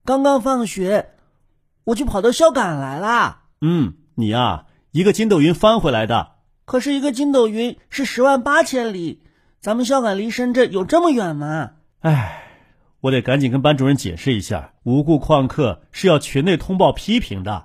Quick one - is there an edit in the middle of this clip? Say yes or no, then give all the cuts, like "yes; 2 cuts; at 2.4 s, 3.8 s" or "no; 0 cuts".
yes; 2 cuts; at 11.9 s, 14.8 s